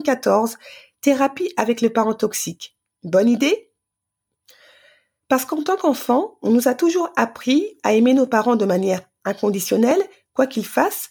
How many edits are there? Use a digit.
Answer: 1